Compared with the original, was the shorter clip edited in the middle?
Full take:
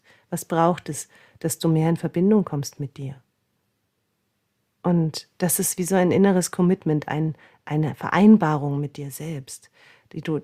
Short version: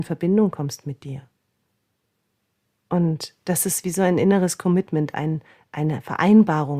no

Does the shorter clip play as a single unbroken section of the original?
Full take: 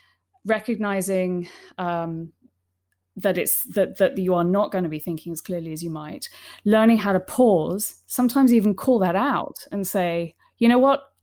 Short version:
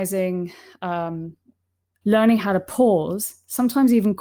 no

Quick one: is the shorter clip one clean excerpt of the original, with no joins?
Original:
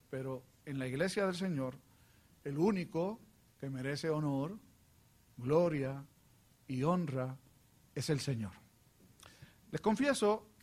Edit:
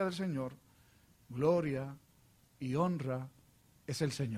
no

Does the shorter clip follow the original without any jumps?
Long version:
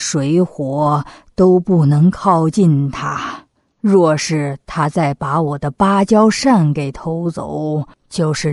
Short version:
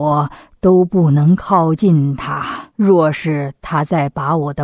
no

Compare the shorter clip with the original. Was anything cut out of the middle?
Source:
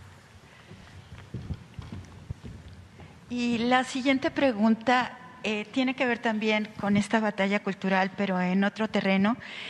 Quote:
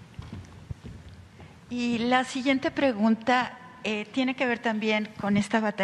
no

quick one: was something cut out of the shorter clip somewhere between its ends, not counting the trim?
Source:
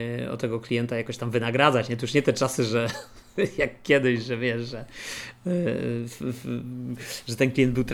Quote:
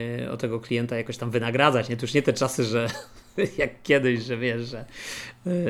no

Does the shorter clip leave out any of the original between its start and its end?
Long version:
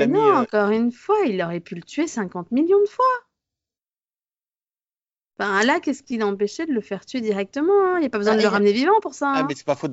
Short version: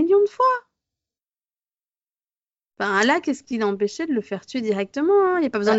no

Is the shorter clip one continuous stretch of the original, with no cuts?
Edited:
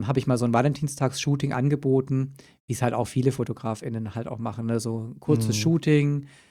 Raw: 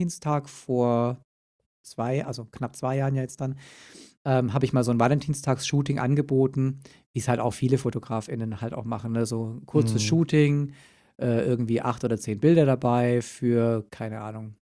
yes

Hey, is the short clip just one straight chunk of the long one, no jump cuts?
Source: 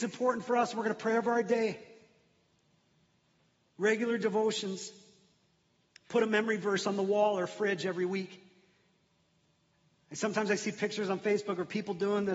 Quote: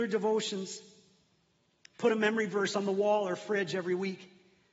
yes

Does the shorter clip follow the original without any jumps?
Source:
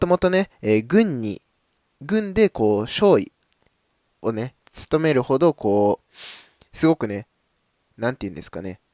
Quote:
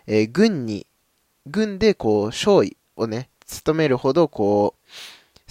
no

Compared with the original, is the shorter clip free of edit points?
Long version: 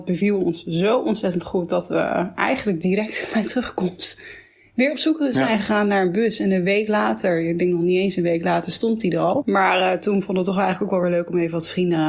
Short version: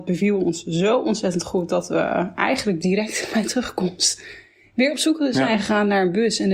yes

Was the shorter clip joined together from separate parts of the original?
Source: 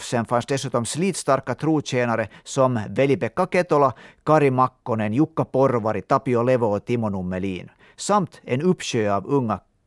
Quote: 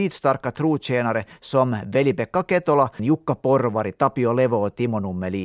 yes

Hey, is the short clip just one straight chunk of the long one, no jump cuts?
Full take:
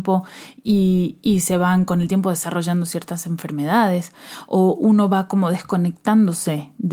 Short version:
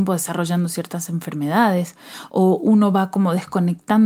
yes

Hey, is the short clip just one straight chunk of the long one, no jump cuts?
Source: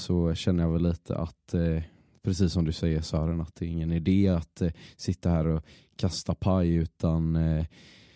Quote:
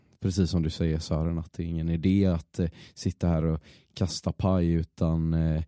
yes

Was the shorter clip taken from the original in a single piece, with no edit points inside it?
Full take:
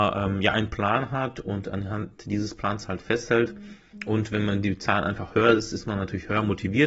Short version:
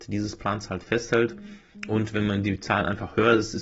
yes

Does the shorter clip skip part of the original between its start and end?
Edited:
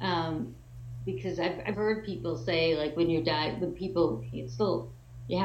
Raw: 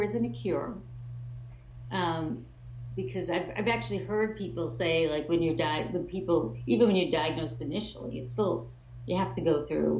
yes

